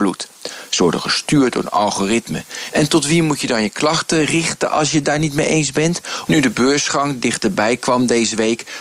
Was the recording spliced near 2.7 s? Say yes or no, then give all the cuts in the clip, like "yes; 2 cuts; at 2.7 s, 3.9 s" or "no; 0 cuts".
yes; 2 cuts; at 2.7 s, 6.3 s